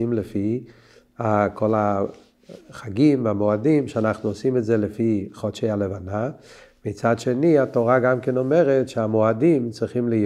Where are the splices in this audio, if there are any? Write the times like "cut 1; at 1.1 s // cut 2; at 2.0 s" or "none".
none